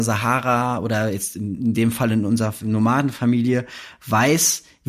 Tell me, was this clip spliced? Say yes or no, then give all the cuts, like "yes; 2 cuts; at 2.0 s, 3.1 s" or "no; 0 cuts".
no; 0 cuts